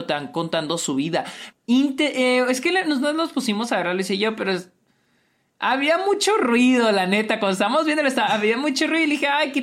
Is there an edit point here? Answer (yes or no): yes